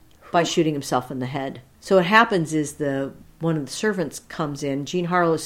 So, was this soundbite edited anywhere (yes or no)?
no